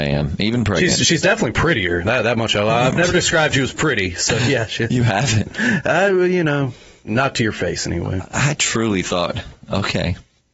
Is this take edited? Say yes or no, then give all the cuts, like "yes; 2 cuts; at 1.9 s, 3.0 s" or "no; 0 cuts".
yes; 1 cut; at 7.0 s